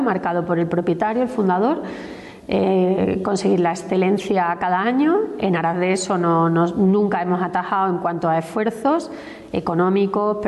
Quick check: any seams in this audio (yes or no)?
no